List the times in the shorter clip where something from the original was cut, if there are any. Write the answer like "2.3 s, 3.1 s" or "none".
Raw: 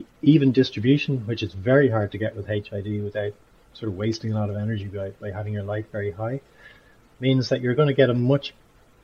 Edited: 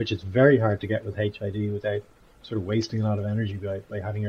none

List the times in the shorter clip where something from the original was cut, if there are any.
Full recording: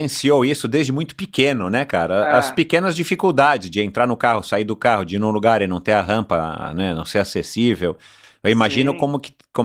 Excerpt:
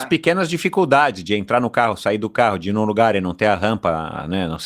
none

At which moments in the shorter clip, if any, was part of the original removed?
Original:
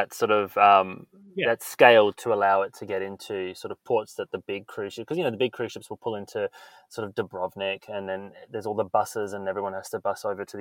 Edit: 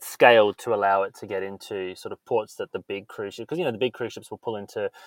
none

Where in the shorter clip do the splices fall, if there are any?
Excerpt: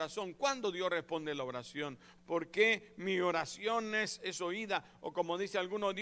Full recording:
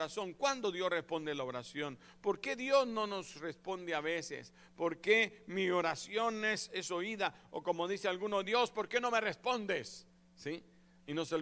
2.2 s

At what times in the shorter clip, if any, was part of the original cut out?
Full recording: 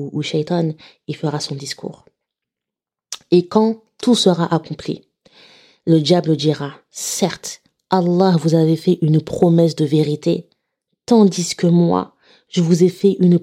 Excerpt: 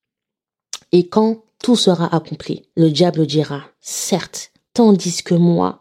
2.7 s, 4.7 s

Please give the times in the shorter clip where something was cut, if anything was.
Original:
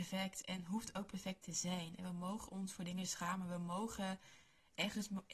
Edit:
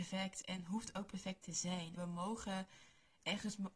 2.0 s

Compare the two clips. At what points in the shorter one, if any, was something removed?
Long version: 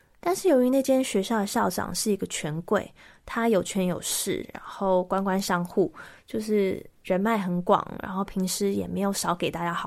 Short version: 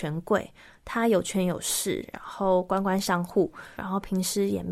3.8 s

